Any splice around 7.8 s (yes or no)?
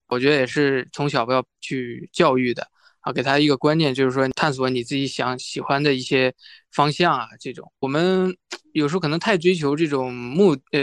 yes